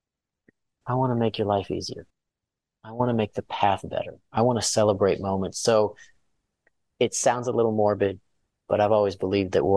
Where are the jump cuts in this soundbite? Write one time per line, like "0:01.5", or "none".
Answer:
none

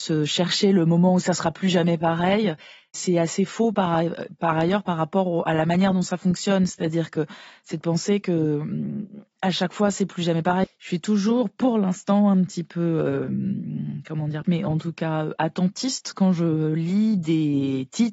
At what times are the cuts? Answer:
0:10.6
0:14.4

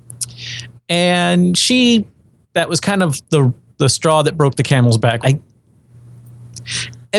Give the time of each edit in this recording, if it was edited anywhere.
0:05.2

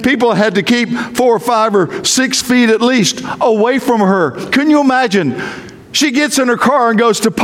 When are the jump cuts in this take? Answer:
none

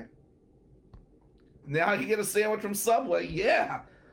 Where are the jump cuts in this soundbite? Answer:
0:01.6

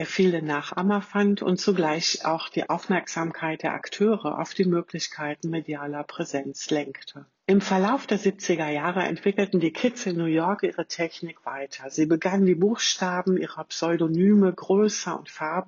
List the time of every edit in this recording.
none

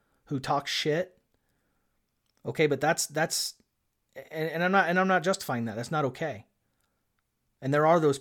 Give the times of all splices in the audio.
none

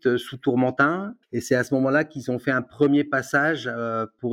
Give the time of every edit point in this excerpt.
0:01.2

